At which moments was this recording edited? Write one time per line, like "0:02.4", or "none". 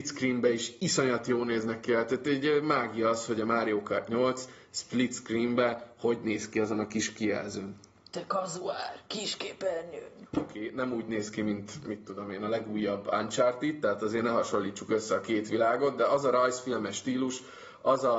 0:10.3